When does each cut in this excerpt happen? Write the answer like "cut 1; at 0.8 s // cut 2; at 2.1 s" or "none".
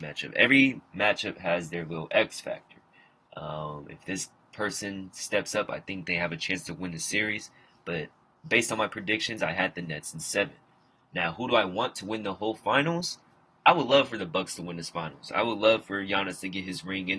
none